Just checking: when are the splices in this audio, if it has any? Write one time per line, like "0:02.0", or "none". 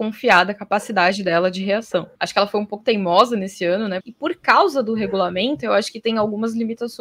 0:02.2
0:04.0